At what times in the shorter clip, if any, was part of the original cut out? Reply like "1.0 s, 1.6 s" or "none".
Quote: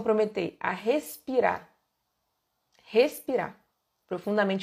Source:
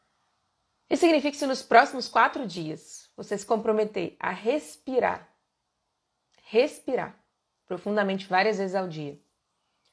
none